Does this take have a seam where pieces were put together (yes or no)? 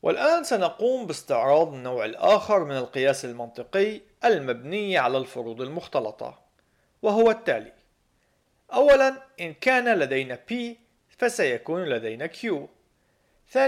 no